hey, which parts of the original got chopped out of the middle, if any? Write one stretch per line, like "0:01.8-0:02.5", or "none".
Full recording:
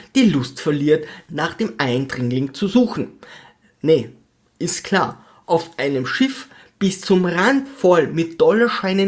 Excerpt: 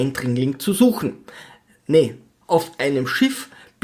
0:04.4-0:05.4